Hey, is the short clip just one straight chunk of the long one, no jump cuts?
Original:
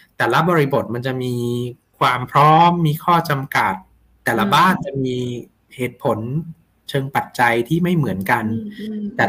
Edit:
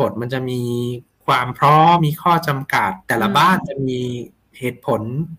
no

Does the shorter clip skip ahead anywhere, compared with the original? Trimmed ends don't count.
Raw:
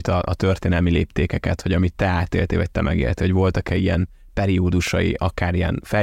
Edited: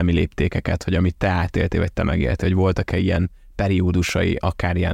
no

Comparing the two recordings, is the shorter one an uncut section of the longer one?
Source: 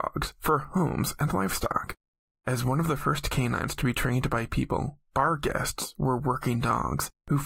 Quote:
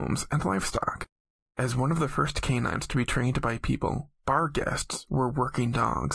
yes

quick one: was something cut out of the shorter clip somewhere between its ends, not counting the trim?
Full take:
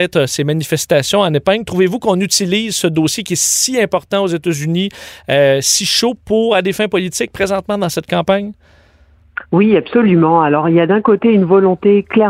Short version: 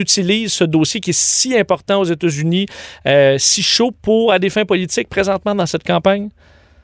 no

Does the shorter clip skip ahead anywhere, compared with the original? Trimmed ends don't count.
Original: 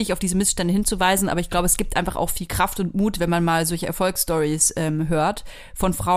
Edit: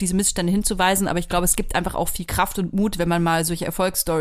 no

